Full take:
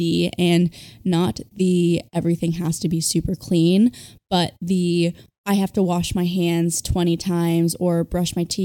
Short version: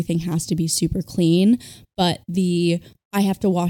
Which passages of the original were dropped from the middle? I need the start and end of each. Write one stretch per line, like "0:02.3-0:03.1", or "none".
none